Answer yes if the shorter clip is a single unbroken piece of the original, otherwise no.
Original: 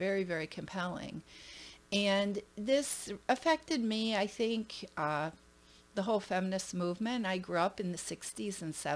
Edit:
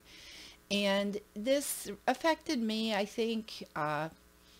yes